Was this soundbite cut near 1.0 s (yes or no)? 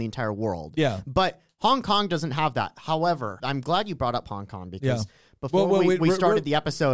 no